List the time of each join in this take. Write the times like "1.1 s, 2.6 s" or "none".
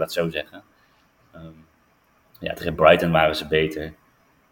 none

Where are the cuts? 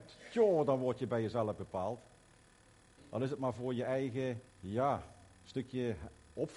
3.0 s, 4.5 s

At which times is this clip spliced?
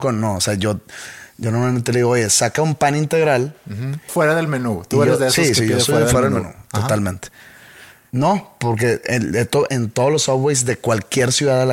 4.1 s, 8.1 s, 9.7 s

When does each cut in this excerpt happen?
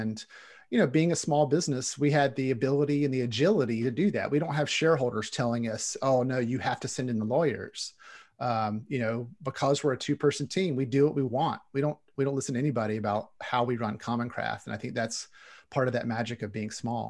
none

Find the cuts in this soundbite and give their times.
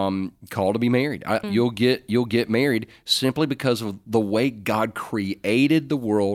1.4 s

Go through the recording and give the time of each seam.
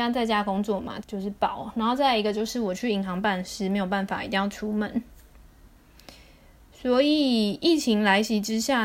1.0 s

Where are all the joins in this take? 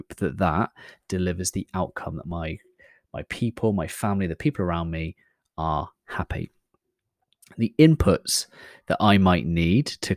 none

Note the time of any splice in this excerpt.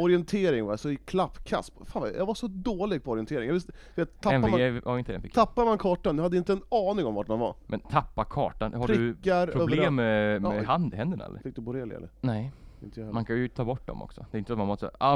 11.4 s

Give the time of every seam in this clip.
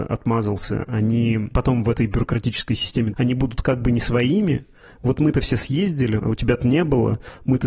3.1 s, 6.2 s

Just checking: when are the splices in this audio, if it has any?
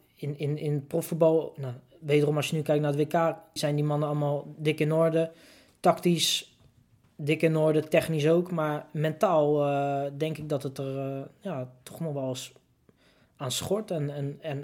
3.6 s

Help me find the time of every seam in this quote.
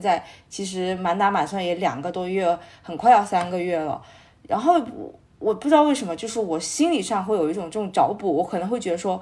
none

